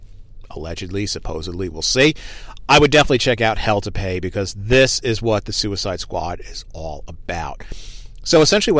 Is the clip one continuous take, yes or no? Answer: yes